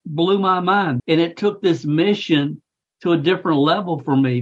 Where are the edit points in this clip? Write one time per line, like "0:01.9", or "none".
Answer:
0:01.0